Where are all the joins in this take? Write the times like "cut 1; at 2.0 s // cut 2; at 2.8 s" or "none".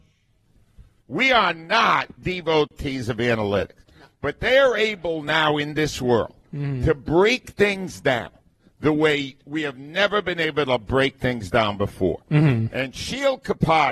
cut 1; at 1.0 s